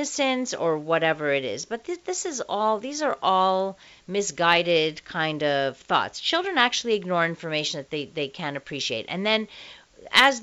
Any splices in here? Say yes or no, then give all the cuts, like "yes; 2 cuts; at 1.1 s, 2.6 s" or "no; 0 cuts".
no; 0 cuts